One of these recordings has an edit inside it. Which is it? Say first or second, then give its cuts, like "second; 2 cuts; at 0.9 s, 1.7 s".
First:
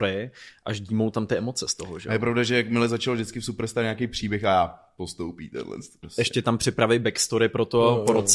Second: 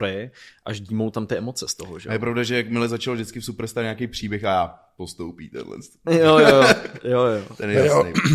first; 1 cut; at 6.0 s